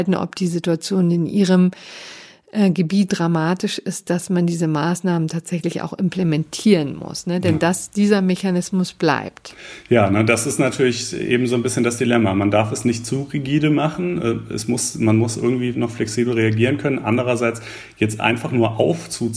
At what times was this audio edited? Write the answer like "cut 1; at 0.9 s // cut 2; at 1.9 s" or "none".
cut 1; at 3.1 s